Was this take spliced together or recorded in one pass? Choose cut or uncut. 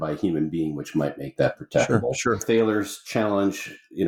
cut